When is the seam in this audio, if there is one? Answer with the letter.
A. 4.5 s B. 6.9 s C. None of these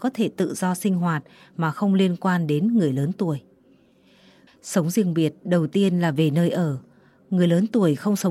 A